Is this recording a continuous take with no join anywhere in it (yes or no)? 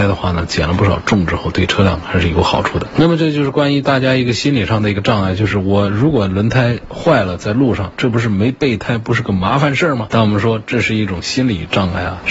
yes